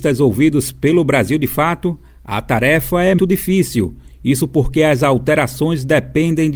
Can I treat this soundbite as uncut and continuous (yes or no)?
no